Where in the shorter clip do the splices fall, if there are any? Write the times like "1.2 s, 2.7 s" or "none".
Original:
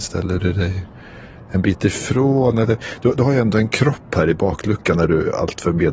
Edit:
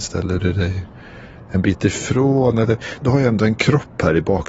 3.0 s